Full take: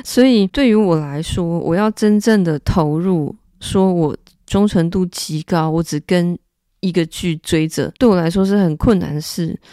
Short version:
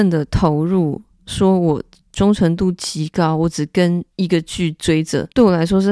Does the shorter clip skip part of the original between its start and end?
yes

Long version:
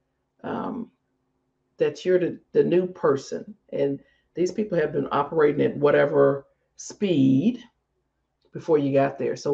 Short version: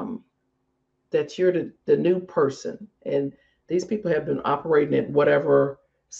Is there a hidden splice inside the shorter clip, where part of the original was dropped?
no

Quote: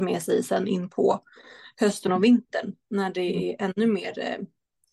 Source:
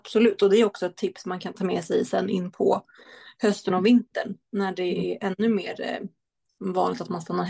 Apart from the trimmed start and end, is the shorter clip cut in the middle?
no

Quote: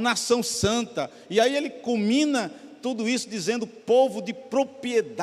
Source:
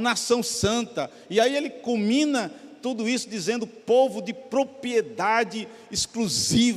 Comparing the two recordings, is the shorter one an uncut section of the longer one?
yes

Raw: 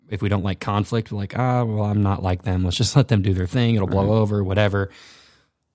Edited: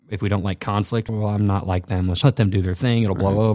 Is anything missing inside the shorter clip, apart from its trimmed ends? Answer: yes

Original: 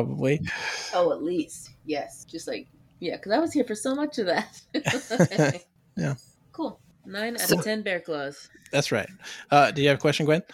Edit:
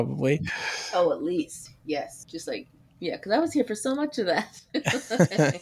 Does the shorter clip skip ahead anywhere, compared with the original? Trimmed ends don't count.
no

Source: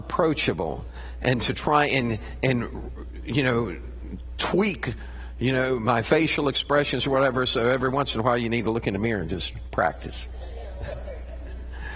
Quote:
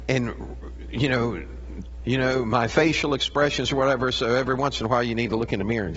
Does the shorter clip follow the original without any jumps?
no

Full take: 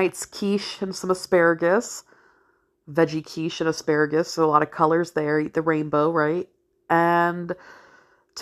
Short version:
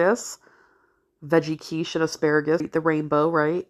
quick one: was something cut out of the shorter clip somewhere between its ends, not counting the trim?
yes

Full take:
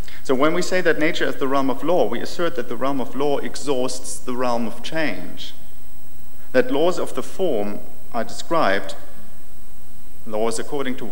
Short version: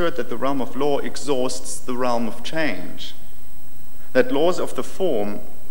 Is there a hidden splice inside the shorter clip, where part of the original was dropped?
no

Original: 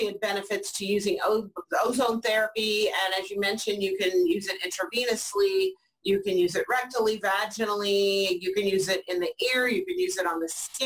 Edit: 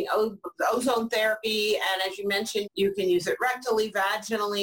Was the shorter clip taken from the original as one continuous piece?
no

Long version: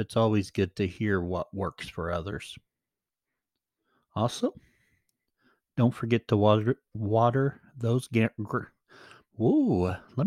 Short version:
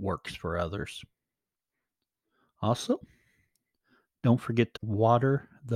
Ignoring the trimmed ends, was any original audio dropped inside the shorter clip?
yes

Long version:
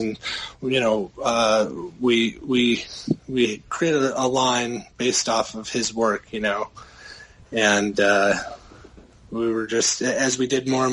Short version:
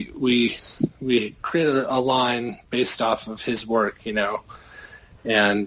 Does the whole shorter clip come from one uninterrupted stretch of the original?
yes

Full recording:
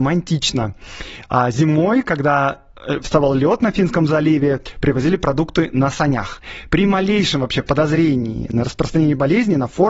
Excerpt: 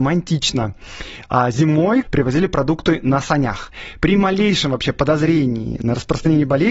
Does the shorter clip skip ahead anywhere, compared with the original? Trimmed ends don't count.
yes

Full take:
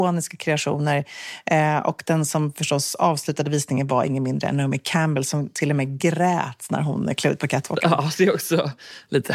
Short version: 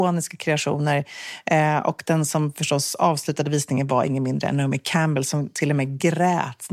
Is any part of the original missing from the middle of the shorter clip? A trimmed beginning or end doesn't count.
no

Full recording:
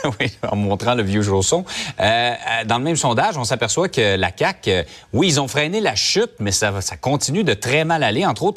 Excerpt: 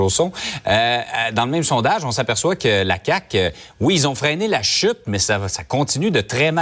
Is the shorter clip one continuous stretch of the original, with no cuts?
yes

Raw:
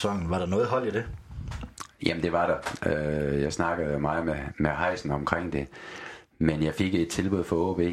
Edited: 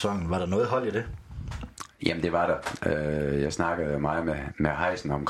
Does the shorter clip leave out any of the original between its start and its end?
no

